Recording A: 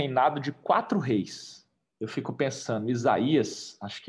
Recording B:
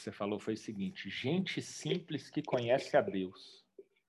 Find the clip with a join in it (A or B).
A